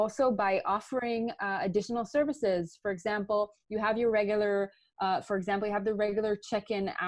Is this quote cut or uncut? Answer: uncut